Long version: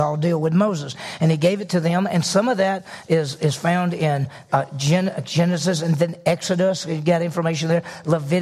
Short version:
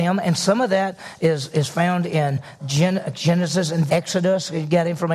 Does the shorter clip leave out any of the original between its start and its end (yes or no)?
yes